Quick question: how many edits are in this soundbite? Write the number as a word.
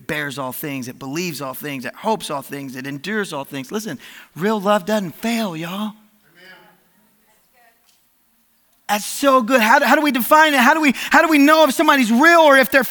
zero